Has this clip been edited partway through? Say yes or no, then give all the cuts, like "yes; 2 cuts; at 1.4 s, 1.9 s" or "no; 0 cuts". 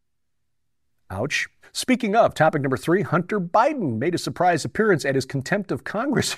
yes; 1 cut; at 1.6 s